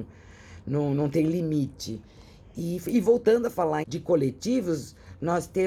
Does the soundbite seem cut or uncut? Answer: cut